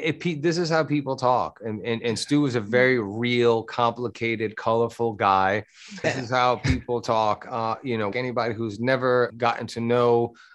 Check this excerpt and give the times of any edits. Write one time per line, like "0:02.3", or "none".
0:06.0
0:08.1
0:09.3